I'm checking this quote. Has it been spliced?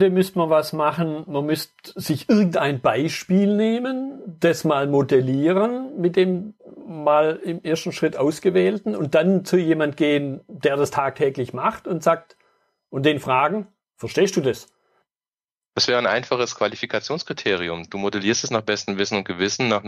no; 0 cuts

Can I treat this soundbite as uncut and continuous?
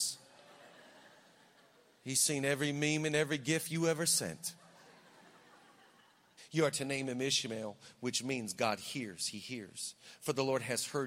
no; 1 cut; at 6.4 s

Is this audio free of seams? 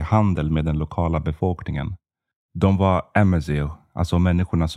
yes; 0 cuts

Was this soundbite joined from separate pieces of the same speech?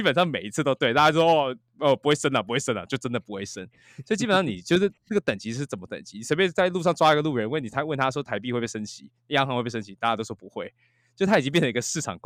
no; 0 cuts

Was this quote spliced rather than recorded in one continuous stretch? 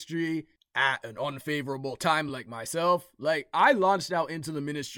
no; 0 cuts

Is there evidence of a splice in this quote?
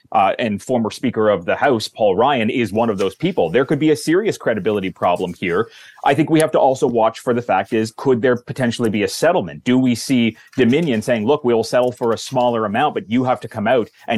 no; 0 cuts

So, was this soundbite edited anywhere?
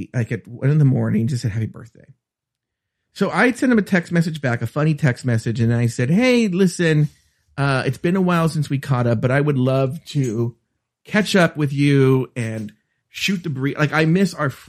no; 0 cuts

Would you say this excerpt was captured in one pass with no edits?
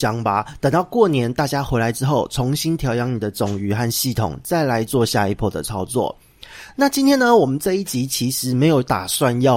yes; 0 cuts

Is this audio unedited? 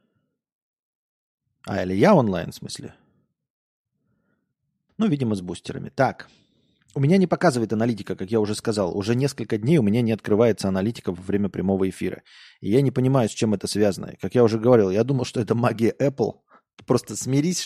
no; 1 cut; at 4.9 s

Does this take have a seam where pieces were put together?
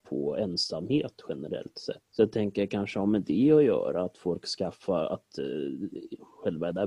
no; 0 cuts

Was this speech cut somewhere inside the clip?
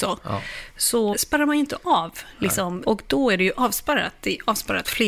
yes; 2 cuts; at 1.1 s, 2.8 s

